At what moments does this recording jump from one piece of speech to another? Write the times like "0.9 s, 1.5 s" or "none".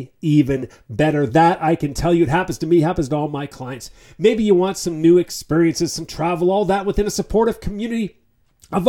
none